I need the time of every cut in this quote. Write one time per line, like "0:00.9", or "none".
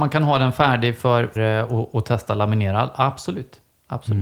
0:01.4